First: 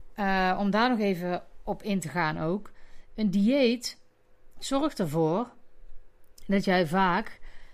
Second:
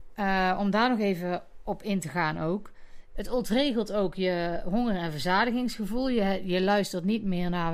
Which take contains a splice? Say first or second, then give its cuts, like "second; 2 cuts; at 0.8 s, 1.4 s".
second; 1 cut; at 3.1 s